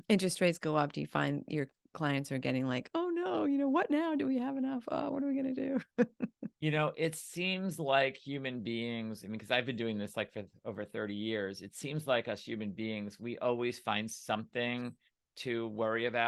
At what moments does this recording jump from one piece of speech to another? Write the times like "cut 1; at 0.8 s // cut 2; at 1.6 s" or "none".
none